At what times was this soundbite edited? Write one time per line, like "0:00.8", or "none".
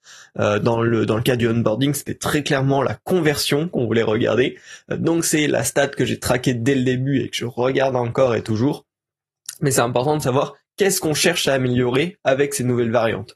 none